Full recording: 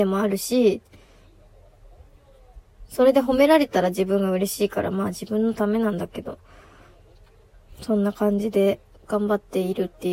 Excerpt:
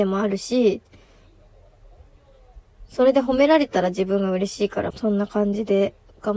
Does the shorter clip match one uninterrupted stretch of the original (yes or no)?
no